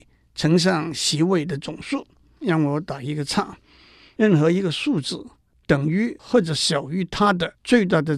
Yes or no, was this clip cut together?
yes